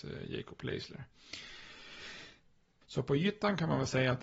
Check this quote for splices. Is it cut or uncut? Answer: cut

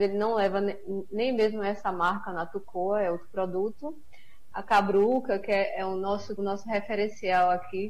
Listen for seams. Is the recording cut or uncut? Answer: cut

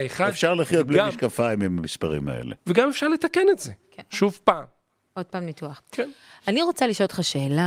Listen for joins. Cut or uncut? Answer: cut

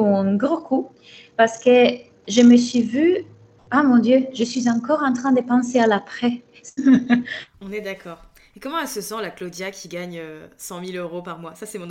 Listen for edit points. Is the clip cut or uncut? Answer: cut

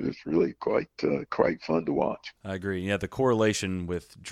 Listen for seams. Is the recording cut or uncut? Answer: cut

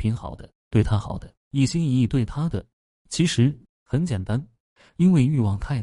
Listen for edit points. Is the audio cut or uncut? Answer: cut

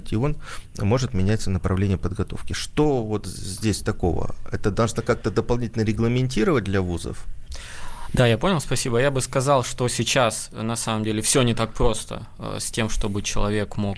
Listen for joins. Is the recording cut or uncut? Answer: uncut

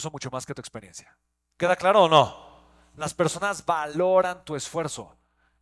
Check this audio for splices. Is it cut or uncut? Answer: uncut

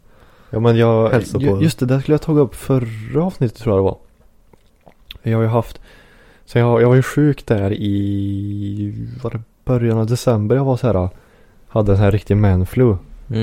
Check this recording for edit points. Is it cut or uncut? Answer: uncut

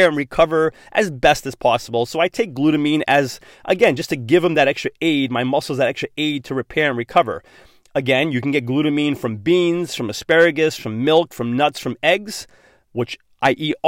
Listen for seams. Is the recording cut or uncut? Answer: uncut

